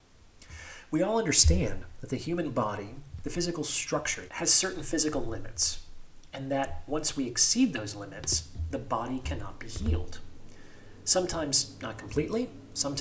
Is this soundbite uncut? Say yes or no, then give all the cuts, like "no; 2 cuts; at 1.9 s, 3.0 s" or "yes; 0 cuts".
no; 1 cut; at 4.3 s